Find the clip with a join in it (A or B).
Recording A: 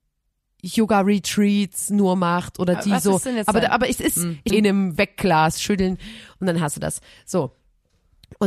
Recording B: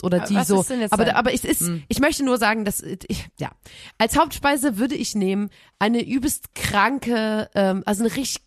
A